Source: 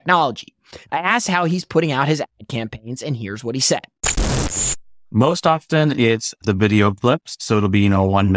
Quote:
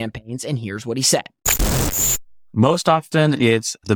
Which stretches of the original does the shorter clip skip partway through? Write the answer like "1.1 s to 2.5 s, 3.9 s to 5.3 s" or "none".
none